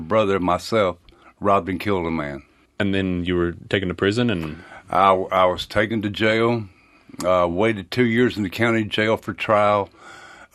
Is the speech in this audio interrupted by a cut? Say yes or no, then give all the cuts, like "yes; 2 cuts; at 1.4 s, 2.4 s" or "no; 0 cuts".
no; 0 cuts